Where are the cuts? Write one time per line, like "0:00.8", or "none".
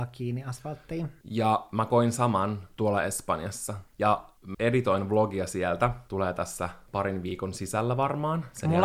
0:04.5